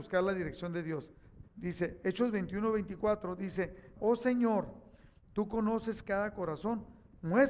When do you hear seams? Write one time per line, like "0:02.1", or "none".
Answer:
0:01.4
0:04.0